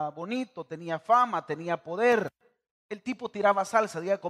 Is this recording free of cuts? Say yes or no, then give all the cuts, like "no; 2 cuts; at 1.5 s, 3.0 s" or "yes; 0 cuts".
yes; 0 cuts